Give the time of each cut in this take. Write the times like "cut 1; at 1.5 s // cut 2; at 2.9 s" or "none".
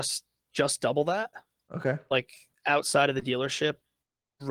none